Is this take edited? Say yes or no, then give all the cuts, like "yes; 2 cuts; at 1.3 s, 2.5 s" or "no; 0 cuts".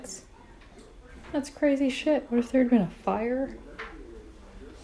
no; 0 cuts